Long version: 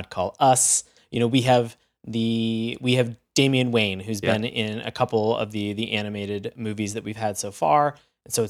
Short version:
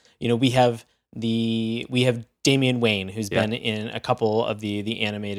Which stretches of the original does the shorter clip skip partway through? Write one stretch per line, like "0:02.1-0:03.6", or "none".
none